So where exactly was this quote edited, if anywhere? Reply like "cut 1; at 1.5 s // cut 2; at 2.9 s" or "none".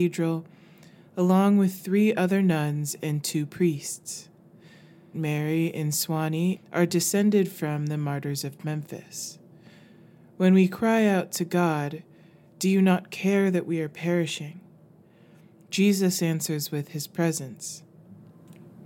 cut 1; at 5.1 s // cut 2; at 6.5 s

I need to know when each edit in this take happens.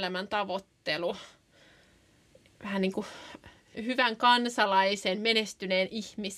cut 1; at 3.7 s

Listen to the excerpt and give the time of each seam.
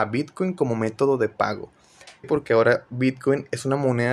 cut 1; at 2.2 s

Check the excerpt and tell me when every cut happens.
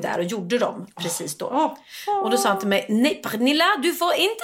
none

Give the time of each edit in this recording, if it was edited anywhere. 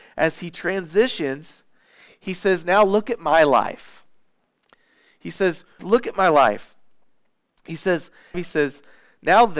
cut 1; at 5.8 s // cut 2; at 8.3 s

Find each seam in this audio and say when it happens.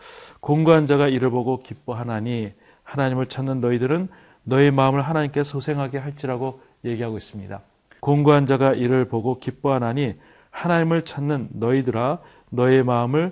cut 1; at 8.0 s

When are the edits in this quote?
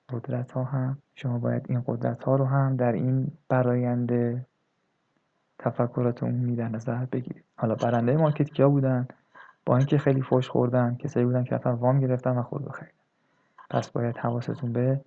cut 1; at 1.0 s // cut 2; at 7.5 s // cut 3; at 13.7 s

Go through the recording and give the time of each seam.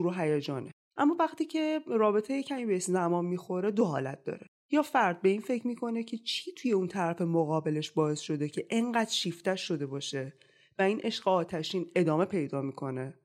none

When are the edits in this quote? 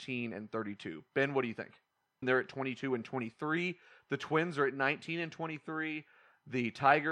cut 1; at 2.2 s

